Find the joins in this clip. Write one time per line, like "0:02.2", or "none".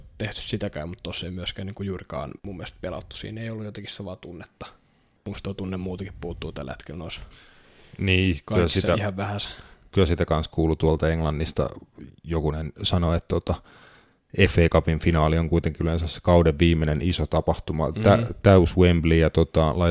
0:02.4